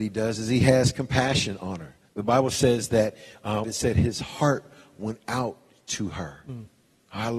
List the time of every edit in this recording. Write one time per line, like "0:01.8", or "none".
0:03.6